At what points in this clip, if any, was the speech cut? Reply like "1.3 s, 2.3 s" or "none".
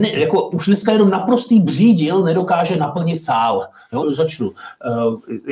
4.0 s

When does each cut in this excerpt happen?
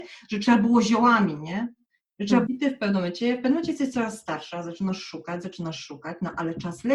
2.5 s

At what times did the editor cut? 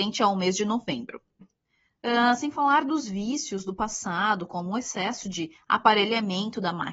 1.4 s

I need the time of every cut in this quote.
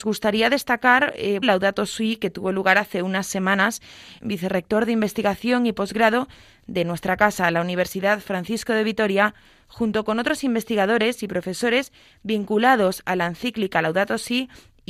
1.4 s, 4.2 s

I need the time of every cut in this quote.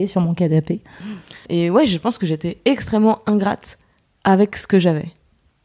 1.5 s

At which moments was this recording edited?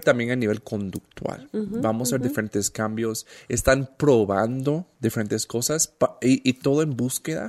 none

